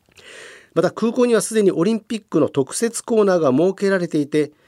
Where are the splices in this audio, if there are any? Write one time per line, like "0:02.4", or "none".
none